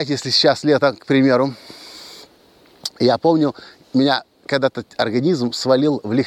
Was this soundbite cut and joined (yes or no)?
no